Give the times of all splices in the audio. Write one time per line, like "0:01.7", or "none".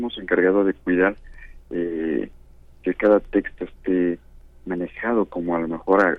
none